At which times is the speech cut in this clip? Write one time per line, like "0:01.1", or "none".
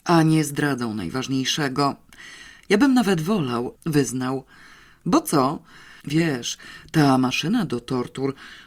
0:03.8
0:06.0